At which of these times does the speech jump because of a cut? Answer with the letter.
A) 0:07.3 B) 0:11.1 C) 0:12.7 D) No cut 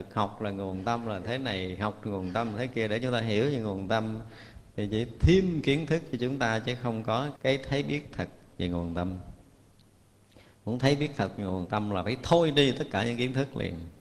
A